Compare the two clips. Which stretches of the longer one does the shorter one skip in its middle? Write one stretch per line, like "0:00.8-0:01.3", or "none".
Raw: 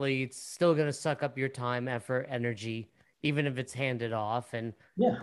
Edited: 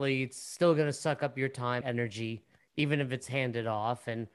0:01.8-0:02.3